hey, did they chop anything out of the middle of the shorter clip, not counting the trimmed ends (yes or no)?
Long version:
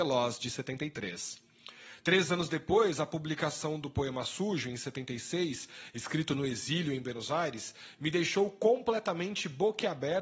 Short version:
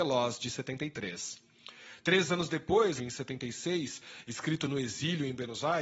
yes